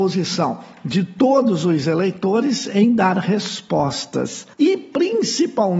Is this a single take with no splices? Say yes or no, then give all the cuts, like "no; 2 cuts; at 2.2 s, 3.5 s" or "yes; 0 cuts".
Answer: no; 1 cut; at 4.5 s